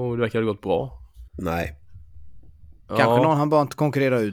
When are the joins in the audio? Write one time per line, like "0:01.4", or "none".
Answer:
0:01.3
0:02.9